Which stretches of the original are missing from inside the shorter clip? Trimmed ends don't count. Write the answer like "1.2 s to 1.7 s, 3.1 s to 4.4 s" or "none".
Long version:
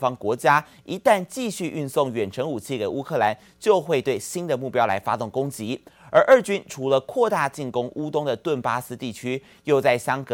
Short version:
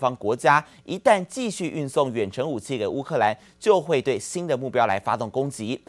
none